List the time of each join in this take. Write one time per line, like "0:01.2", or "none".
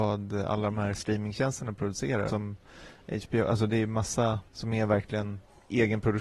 0:02.3
0:04.5